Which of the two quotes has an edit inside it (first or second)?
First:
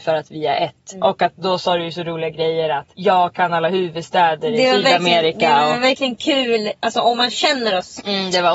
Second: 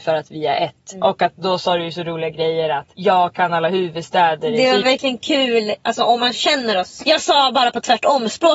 second